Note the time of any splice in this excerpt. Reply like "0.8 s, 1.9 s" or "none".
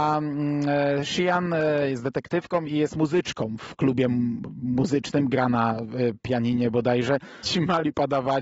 7.4 s